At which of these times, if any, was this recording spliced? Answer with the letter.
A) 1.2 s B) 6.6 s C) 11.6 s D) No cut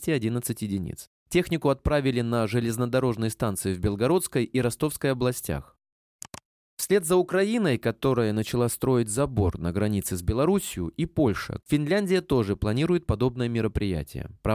C